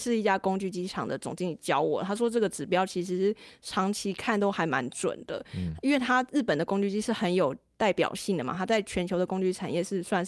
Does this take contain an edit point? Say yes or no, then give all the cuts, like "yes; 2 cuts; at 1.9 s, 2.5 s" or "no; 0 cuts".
no; 0 cuts